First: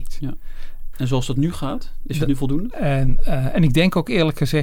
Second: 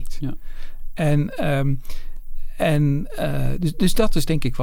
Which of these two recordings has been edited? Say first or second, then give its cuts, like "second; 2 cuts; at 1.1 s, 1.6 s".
first; 2 cuts; at 0.9 s, 2.7 s